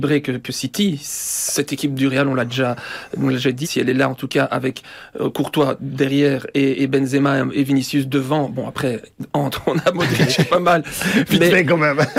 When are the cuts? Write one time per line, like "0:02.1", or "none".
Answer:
0:03.6